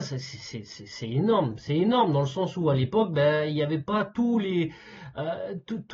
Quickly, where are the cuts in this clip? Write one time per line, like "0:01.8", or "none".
none